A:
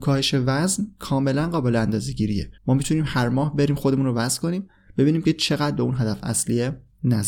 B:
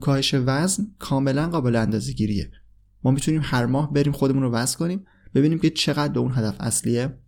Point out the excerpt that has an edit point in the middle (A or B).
A